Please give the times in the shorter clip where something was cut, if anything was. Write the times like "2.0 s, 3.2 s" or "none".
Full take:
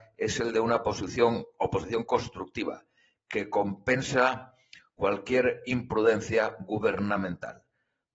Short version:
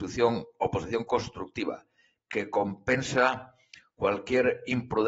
none